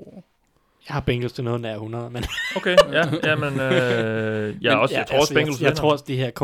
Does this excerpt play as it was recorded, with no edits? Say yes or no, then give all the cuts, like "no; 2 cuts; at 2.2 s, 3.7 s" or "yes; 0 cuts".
yes; 0 cuts